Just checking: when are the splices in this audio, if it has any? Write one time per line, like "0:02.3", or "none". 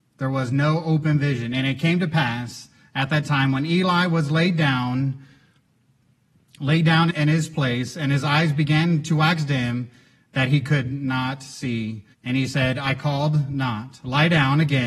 0:07.1
0:12.1